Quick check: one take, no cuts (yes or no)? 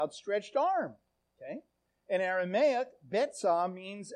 yes